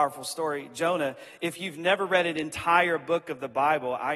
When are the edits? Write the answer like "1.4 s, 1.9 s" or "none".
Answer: none